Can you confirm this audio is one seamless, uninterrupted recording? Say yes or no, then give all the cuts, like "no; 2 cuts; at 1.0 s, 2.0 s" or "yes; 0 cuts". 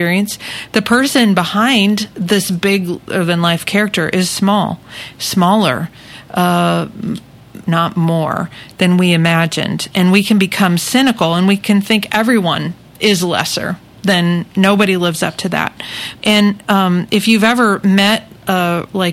no; 2 cuts; at 7.6 s, 16.2 s